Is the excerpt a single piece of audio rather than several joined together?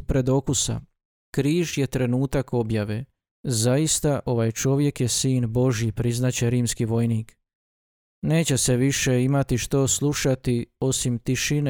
yes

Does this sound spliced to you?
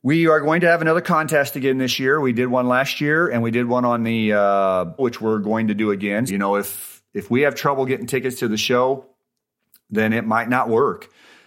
yes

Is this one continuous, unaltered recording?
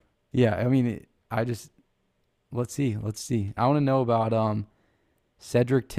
no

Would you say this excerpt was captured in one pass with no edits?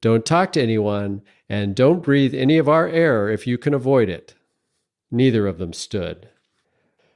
no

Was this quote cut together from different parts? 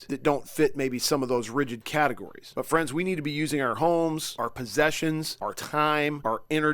no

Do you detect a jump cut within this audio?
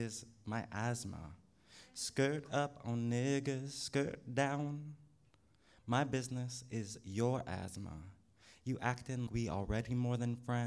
yes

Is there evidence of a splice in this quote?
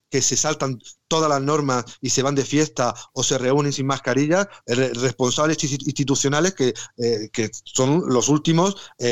yes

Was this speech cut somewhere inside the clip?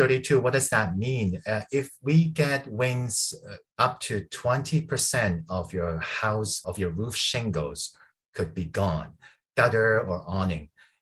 yes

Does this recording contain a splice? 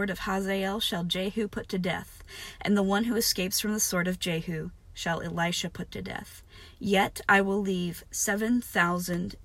no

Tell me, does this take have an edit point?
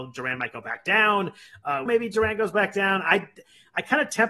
yes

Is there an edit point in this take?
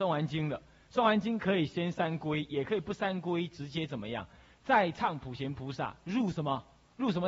no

